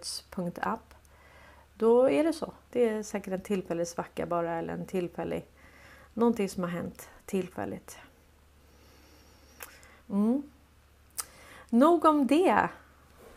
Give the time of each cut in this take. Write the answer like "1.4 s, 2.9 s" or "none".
2.7 s, 10.0 s